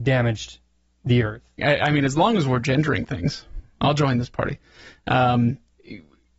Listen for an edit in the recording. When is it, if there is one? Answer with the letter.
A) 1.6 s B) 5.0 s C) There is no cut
A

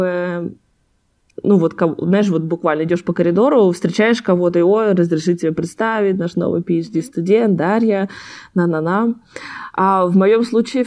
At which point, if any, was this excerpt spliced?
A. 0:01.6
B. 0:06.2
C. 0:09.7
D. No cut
D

